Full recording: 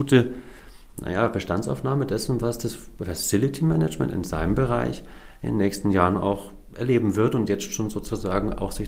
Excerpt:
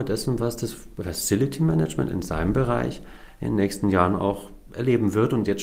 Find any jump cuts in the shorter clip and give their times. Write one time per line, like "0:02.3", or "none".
none